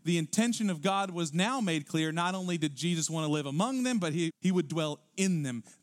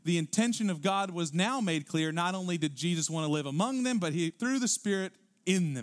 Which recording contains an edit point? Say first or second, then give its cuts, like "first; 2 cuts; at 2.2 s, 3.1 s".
first; 1 cut; at 4.3 s